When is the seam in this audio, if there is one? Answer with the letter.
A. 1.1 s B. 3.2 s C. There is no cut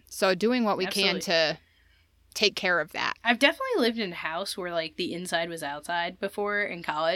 B